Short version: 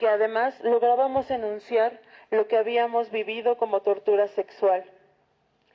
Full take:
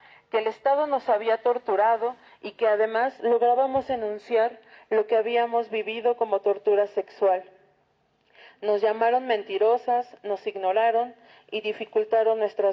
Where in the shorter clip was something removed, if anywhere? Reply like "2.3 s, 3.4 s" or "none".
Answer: none

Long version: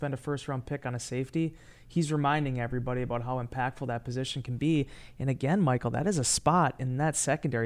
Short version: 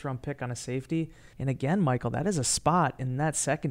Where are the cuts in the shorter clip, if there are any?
1.3 s

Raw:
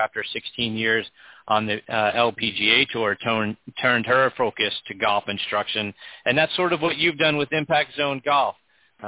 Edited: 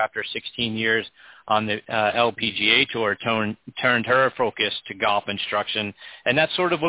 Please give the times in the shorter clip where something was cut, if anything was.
none

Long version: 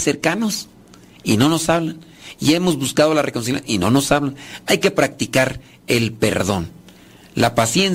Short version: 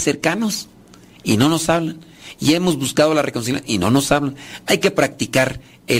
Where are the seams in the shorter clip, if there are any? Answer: none

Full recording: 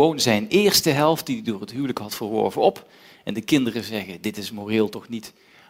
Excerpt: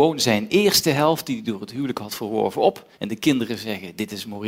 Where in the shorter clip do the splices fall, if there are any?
2.9 s

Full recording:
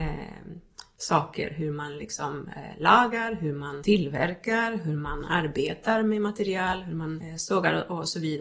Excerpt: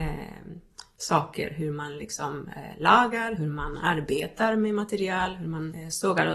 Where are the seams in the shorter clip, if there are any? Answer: 3.4 s

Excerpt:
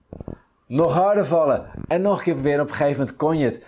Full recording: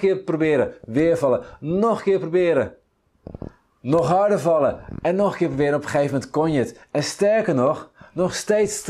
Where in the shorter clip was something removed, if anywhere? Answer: none

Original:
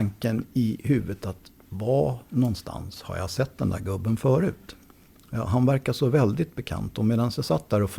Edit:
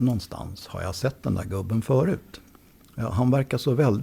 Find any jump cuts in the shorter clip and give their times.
none

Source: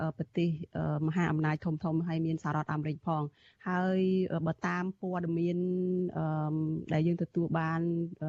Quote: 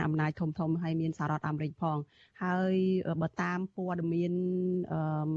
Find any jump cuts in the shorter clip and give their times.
none

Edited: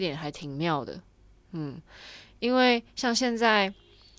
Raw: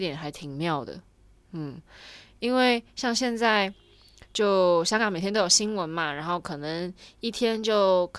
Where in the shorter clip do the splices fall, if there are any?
none

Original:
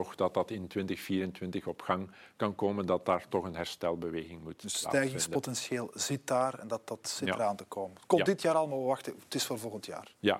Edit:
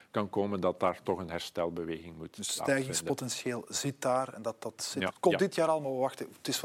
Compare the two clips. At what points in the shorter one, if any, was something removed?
5.1 s

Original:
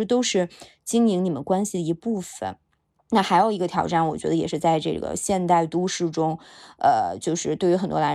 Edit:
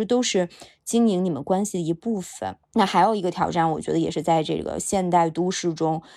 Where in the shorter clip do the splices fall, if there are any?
2.6 s

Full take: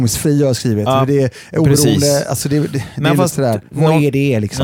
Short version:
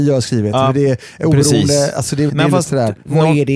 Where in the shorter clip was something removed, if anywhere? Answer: 2.3 s

